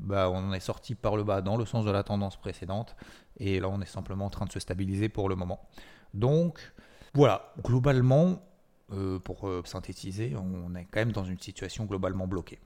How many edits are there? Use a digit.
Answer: 3